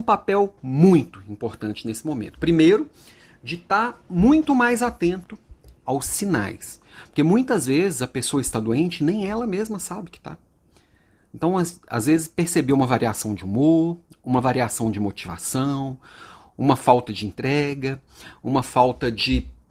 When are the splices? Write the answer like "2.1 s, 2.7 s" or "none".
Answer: none